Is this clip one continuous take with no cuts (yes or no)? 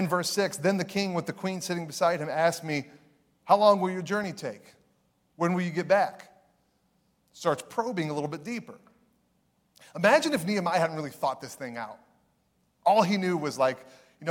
yes